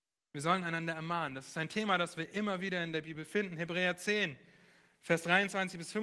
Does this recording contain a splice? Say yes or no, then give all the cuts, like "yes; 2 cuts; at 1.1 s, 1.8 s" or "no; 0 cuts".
no; 0 cuts